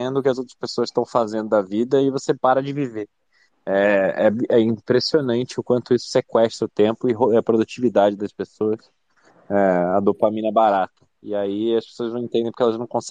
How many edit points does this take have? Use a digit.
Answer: 0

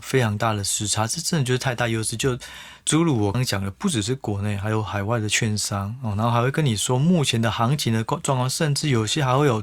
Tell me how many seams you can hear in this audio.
1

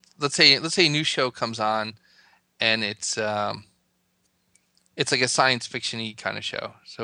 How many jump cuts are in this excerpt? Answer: 0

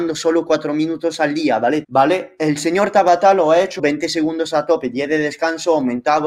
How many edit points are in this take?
2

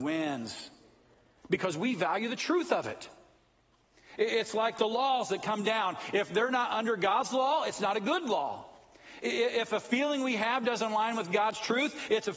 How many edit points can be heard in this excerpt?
0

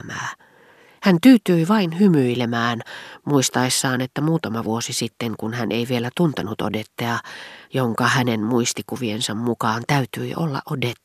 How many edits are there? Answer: 1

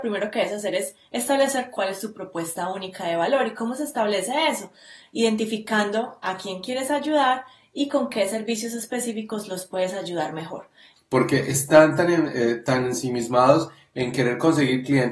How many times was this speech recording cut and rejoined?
1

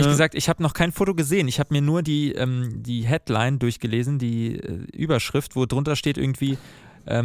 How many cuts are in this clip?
0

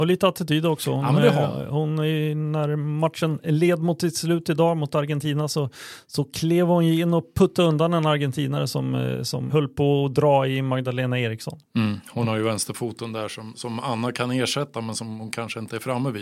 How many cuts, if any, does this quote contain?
2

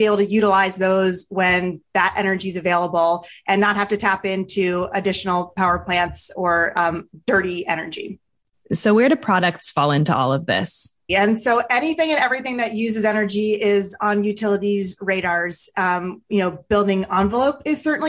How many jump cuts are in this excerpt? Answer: 1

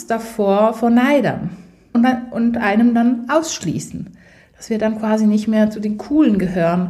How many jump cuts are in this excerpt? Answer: 1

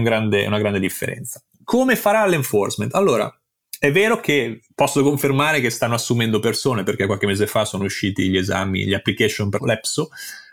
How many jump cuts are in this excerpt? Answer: 0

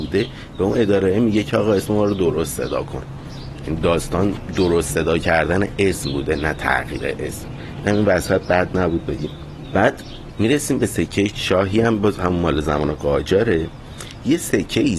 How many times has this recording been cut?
1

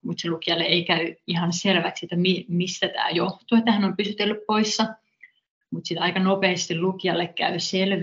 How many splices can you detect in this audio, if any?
1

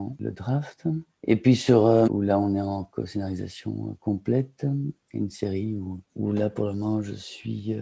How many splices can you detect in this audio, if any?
1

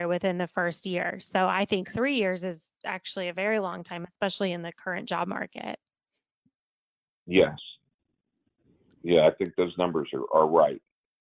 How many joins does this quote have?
0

